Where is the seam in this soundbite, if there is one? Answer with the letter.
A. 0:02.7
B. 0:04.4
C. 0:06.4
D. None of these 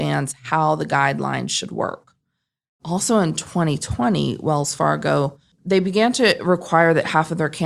D